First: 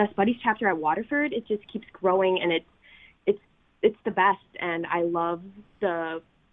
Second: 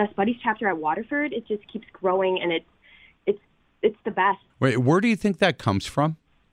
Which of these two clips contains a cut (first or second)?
second